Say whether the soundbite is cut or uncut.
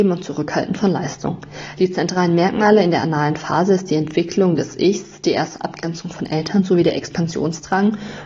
uncut